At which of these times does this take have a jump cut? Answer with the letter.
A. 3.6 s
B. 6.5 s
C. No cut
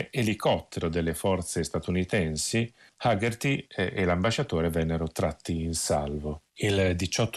B